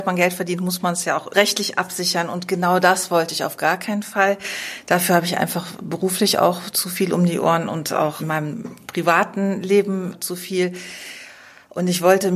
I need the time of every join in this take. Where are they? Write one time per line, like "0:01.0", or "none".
none

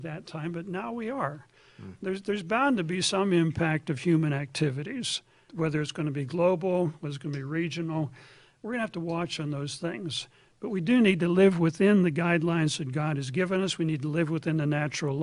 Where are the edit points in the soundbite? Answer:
0:05.5

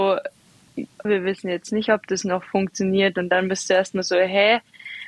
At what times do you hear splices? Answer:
0:01.1

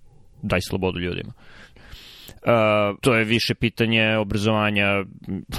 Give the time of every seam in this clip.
0:01.7
0:03.0

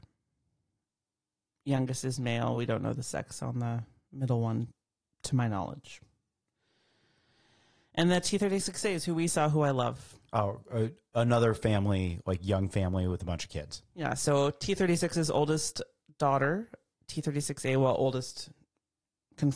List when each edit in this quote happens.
none

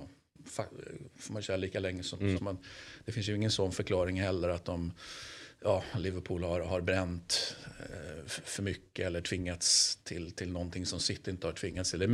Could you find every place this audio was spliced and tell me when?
0:02.4

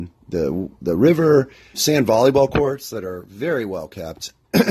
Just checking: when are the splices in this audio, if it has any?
0:01.7

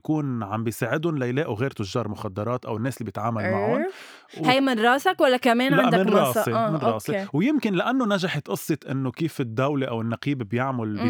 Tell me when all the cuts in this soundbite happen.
none

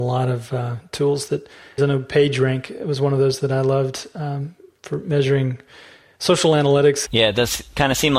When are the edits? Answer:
0:01.8
0:07.1

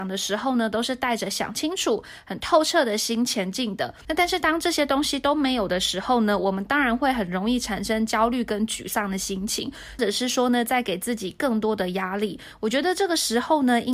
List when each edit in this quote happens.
0:04.0
0:10.0

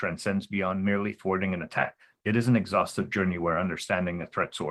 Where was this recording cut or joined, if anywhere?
none

